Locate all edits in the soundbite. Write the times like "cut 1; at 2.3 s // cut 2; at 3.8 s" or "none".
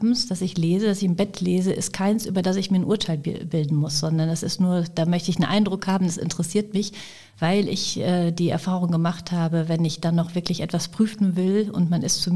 none